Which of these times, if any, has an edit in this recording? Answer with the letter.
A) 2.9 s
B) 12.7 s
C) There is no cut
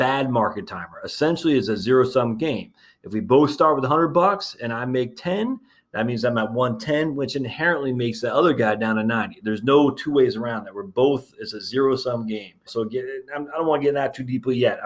B